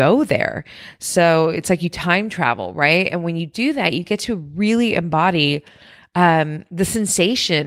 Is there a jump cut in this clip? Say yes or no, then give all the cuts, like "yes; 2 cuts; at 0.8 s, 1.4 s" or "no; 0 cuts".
no; 0 cuts